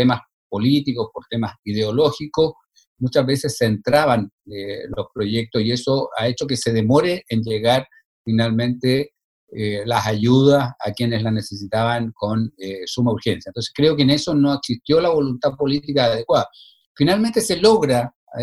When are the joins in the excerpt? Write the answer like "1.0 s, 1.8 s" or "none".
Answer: none